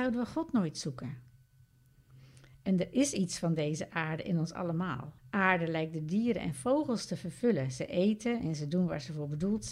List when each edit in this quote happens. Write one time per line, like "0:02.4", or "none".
0:05.2